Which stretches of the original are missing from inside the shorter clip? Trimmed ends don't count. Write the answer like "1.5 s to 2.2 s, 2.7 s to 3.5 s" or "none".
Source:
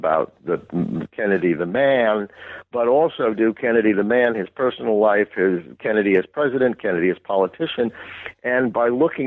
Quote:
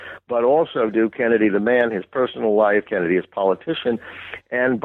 5.3 s to 6.8 s